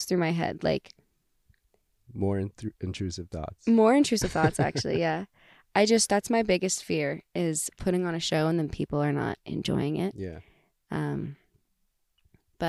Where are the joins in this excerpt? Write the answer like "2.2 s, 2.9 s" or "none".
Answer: none